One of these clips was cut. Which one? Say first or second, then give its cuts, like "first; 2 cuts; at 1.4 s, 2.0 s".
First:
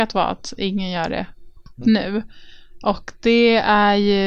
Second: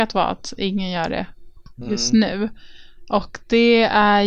first; 1 cut; at 1.8 s